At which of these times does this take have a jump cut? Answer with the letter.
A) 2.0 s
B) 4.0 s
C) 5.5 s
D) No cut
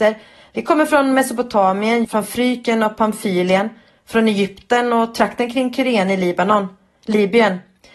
A